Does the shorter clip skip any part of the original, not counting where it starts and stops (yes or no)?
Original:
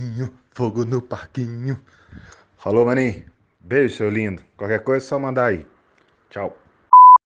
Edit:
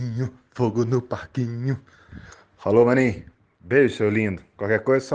no